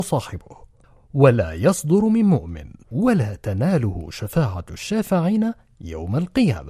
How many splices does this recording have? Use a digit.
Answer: 1